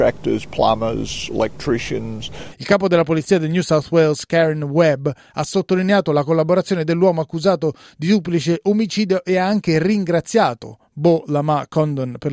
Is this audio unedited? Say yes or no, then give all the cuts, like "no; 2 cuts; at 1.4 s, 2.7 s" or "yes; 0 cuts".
no; 1 cut; at 2.5 s